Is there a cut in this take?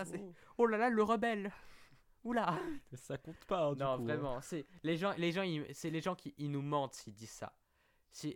no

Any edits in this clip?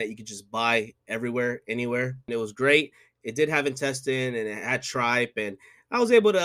yes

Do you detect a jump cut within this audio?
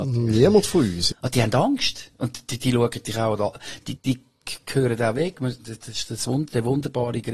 yes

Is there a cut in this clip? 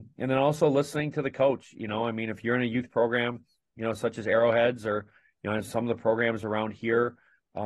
no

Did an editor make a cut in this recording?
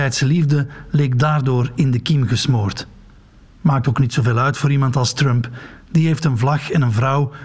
no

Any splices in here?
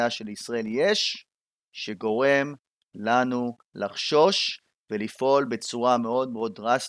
no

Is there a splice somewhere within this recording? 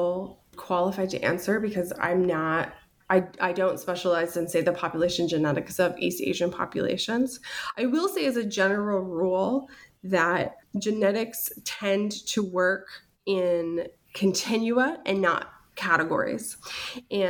no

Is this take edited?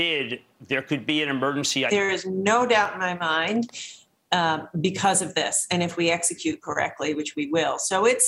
yes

